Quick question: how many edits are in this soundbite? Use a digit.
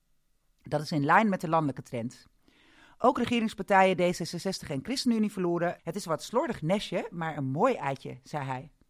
1